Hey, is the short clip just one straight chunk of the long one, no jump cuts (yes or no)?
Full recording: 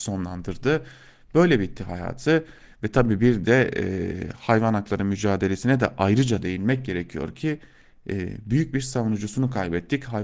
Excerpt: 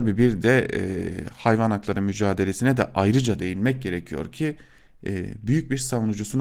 yes